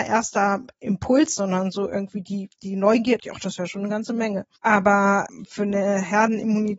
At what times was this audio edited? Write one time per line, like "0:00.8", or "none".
0:01.4
0:03.2